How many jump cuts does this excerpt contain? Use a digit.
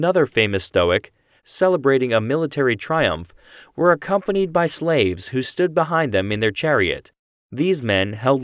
1